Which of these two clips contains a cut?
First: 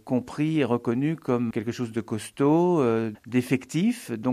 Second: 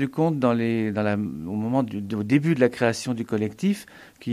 first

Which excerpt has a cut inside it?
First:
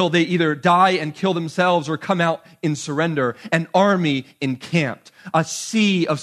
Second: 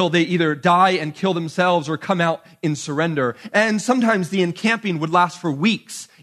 second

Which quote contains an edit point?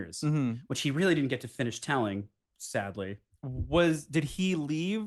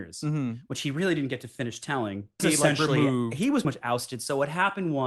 second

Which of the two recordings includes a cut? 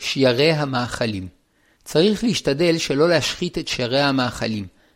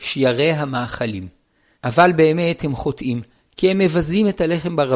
second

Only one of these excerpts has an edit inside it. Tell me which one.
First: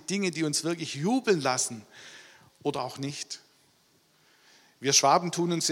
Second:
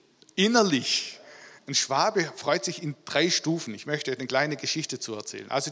second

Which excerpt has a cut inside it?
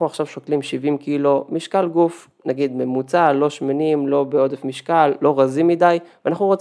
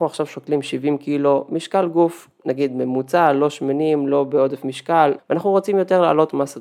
second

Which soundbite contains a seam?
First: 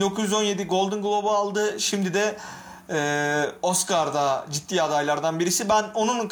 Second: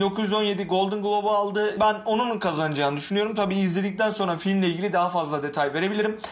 second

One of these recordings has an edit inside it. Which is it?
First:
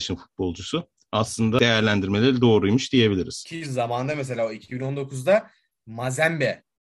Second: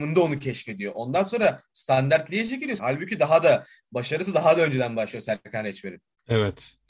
second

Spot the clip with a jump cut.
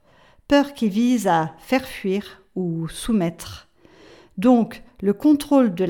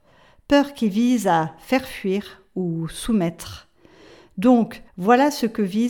second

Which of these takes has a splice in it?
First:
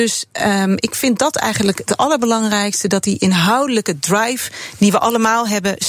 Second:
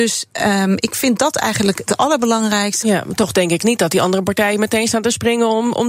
second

